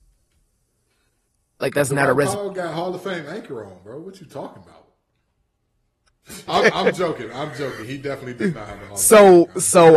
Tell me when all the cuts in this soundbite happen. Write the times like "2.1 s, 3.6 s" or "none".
6.5 s